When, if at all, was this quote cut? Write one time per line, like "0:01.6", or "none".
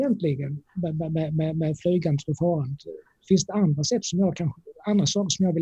none